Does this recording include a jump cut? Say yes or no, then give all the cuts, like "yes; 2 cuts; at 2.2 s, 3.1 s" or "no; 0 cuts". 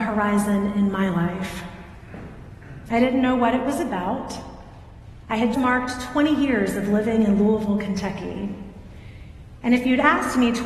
yes; 1 cut; at 5.5 s